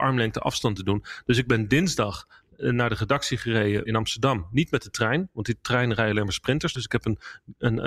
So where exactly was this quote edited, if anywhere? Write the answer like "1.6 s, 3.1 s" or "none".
3.9 s, 6.8 s